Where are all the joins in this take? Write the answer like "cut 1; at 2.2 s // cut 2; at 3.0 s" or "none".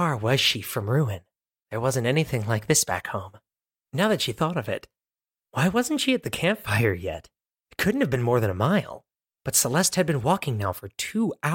none